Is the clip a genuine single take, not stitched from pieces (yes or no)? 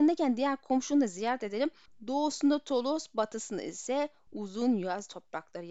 no